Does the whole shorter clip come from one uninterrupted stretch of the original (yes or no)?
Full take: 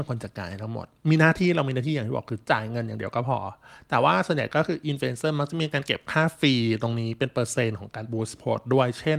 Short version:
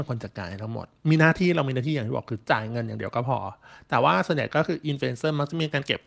yes